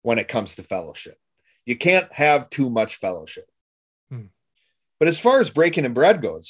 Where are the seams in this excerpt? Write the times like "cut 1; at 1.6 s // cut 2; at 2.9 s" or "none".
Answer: none